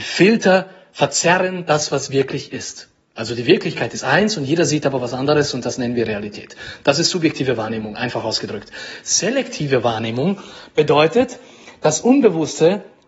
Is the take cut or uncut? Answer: uncut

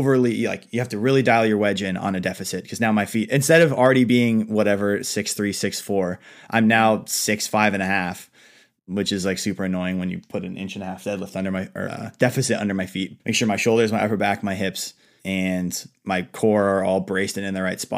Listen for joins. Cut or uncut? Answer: cut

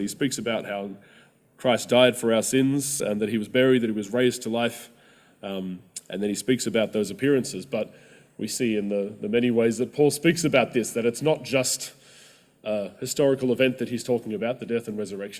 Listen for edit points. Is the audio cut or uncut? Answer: uncut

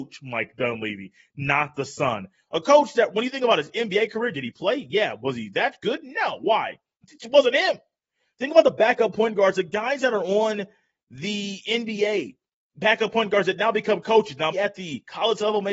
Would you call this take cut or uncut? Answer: cut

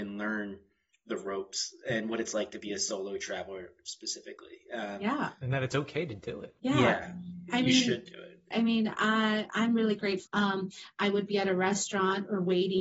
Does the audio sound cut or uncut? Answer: cut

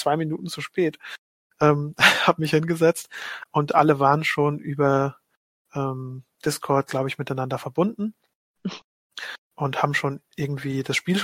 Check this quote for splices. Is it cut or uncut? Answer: uncut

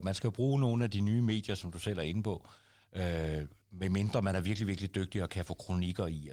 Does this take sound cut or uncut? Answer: cut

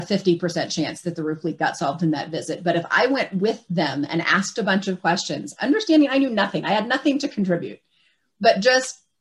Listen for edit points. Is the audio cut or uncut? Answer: uncut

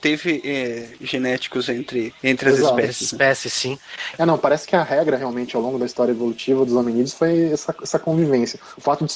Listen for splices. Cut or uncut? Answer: cut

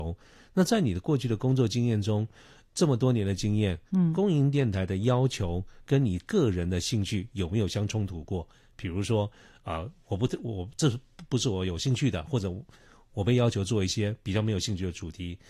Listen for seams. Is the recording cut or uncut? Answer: uncut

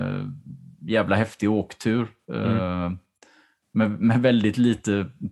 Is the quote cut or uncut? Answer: uncut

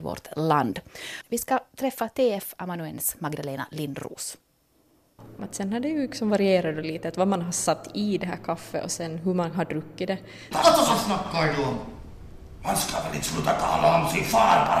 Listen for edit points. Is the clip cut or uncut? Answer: cut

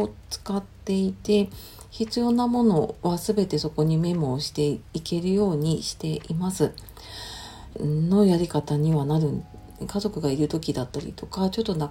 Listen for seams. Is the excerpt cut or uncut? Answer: cut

